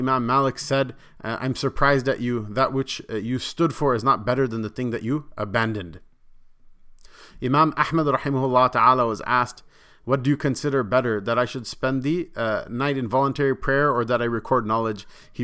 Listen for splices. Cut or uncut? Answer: uncut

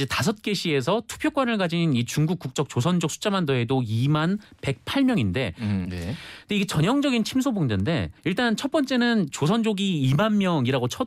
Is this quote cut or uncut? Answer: cut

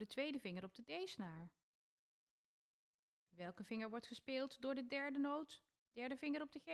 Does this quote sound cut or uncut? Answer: uncut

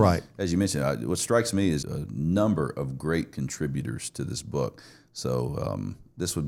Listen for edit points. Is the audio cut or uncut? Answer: cut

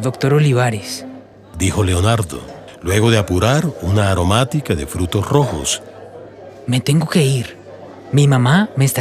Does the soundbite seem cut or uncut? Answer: uncut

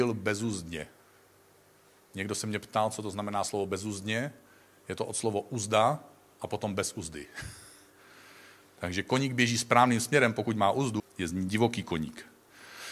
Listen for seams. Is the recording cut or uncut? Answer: cut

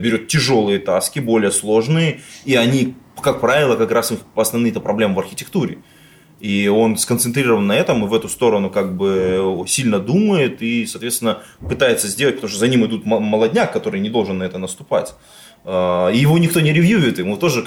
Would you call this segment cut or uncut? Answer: uncut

